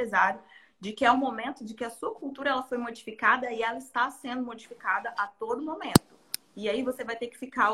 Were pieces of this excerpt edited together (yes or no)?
no